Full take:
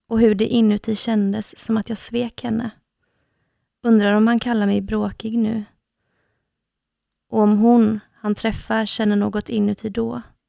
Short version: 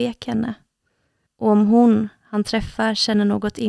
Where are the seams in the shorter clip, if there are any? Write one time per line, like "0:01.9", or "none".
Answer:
0:01.3